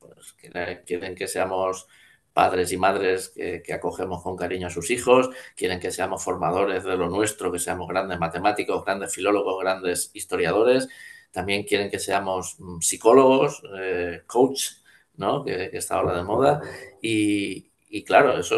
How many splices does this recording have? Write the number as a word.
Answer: zero